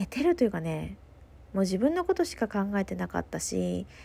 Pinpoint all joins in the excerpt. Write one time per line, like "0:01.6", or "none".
none